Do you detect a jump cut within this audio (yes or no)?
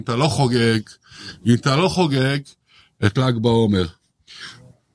no